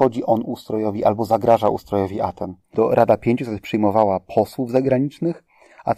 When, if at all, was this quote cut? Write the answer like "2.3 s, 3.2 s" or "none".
2.6 s